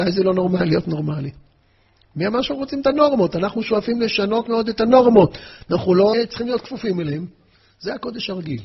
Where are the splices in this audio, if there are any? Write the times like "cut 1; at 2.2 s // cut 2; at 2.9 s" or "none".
cut 1; at 6.1 s